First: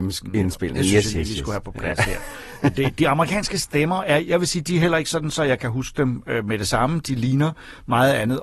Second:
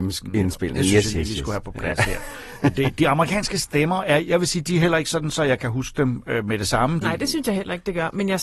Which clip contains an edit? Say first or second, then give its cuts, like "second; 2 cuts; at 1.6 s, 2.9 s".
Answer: second; 1 cut; at 7.0 s